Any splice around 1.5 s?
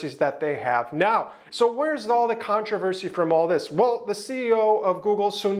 yes; 1 cut; at 1.5 s

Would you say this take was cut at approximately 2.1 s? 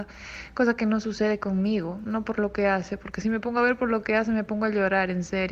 yes; 1 cut; at 2.1 s

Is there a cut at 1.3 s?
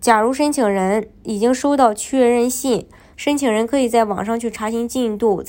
no; 1 cut; at 3.1 s

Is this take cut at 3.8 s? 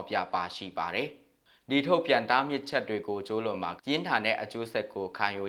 yes; 1 cut; at 3.8 s

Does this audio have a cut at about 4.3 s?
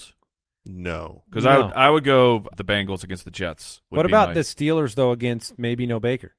no; 1 cut; at 2.5 s

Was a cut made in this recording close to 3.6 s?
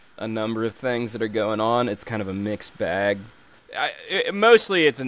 yes; 1 cut; at 3.6 s

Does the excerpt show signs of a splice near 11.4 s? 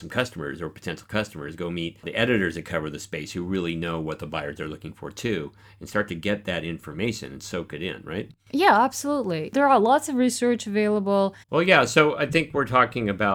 yes; 2 cuts; at 8.4 s, 11.4 s

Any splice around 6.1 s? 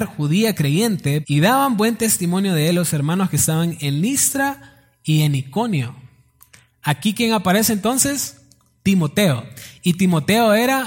no; 1 cut; at 1.2 s

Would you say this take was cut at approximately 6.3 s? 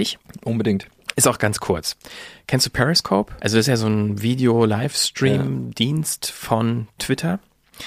no; 1 cut; at 3.4 s

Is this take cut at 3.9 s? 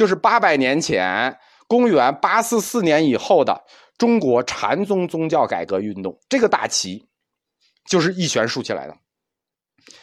no; 0 cuts

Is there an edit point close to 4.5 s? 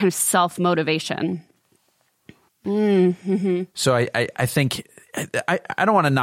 no; 1 cut; at 2.5 s

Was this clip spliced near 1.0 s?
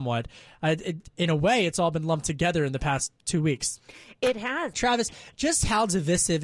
no; 1 cut; at 4.7 s

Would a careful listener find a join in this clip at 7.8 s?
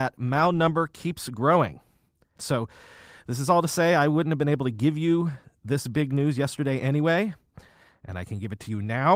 no; 1 cut; at 2.4 s

